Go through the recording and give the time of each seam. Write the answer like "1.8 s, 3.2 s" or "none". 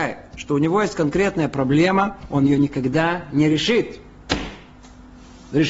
none